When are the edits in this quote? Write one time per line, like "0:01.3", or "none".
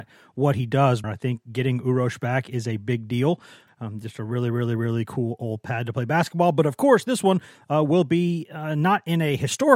0:01.0
0:03.7